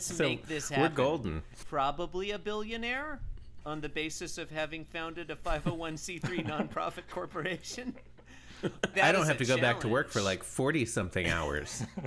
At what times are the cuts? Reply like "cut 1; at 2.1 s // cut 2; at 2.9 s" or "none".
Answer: cut 1; at 1.6 s // cut 2; at 8.9 s